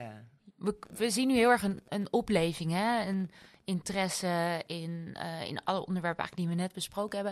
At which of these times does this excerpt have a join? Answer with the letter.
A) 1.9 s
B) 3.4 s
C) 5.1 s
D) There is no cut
A